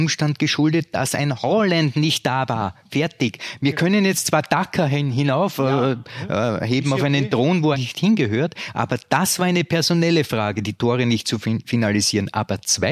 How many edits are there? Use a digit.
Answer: 1